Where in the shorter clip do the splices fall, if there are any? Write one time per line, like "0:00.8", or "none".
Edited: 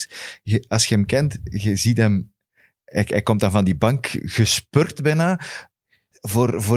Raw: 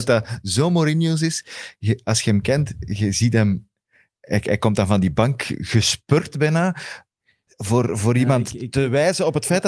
none

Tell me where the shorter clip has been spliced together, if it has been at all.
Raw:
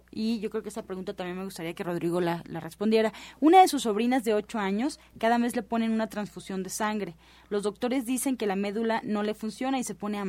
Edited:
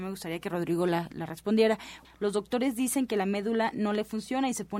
0:02.0

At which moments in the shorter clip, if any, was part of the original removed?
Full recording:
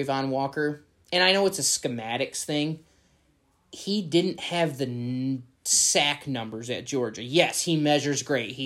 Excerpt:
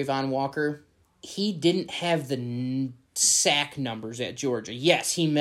0:01.0

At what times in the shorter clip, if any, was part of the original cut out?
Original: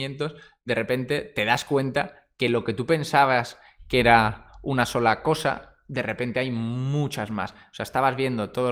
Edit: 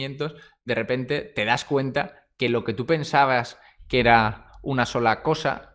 none

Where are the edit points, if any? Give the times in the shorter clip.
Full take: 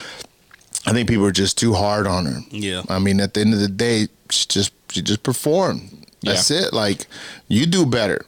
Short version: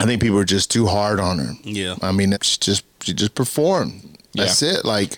0:02.3

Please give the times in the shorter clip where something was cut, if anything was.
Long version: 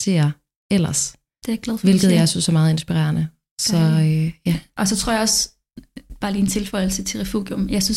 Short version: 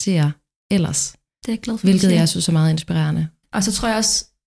0:03.4

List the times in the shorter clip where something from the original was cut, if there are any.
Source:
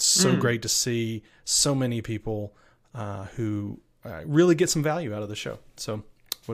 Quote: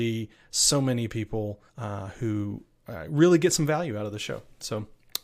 0:01.7

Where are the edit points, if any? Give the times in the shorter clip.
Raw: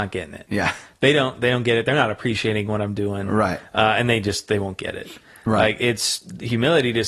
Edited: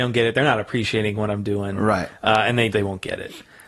0:02.7

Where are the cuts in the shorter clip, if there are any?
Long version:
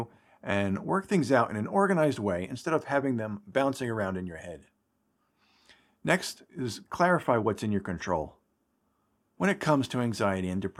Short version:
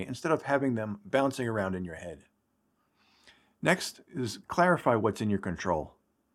none

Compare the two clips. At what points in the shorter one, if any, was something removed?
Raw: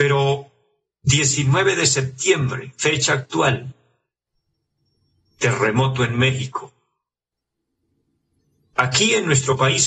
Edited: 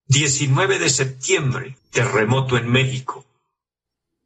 0:01.8

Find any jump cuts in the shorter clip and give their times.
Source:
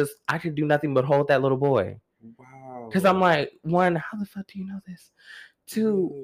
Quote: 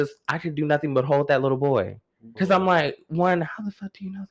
0:02.3

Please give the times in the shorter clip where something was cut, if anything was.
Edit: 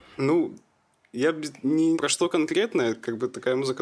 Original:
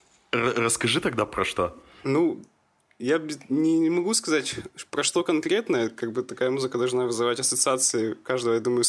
0:01.9

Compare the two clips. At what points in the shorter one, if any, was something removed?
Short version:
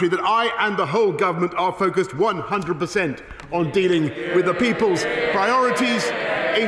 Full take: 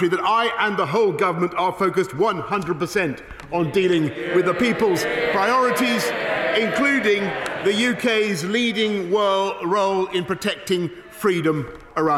none

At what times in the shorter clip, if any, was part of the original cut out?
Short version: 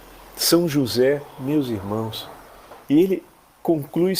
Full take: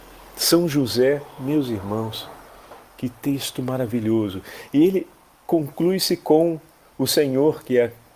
0:02.8

